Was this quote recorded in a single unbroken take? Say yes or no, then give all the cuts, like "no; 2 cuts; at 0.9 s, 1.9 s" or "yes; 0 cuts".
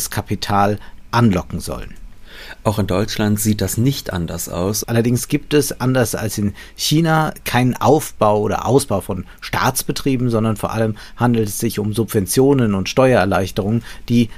no; 1 cut; at 4.8 s